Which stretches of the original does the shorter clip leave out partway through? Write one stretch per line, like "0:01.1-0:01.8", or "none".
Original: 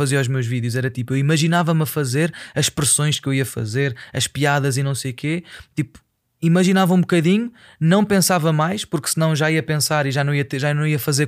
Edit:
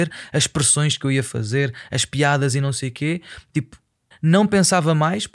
0:06.3-0:07.7